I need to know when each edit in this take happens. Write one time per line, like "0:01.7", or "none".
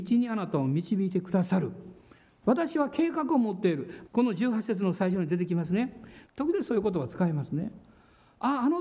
0:02.4
0:04.1
0:06.3